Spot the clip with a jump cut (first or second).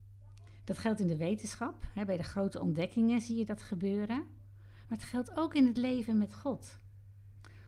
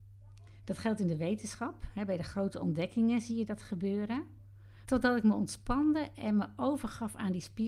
second